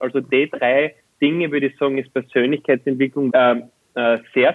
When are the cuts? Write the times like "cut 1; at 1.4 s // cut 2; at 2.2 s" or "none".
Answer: cut 1; at 3.3 s